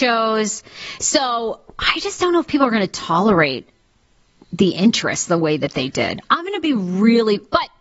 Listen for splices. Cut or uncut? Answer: uncut